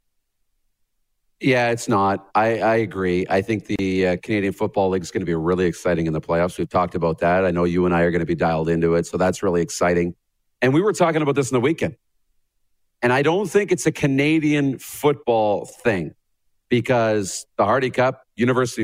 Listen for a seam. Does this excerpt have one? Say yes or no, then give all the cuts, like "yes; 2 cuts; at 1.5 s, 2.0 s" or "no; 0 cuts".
no; 0 cuts